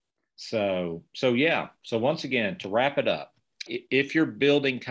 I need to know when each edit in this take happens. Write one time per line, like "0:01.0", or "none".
0:03.7